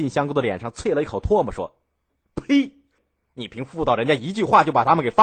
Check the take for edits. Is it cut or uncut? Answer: cut